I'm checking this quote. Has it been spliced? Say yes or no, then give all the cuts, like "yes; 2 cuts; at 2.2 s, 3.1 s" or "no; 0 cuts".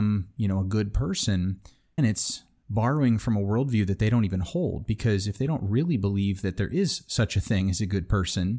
yes; 1 cut; at 2.0 s